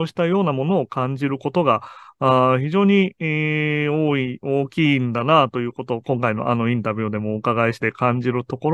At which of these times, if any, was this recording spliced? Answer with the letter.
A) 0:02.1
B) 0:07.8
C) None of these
B